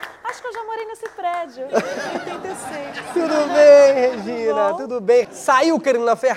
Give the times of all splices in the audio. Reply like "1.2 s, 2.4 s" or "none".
5.2 s